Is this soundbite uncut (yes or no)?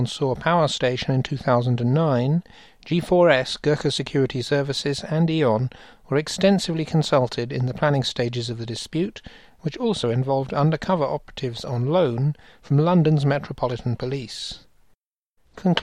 yes